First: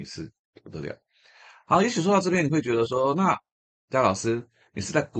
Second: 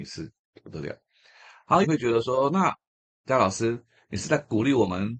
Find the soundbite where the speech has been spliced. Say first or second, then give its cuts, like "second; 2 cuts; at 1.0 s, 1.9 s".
second; 1 cut; at 1.8 s